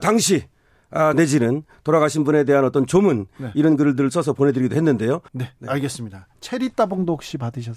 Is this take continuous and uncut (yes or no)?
no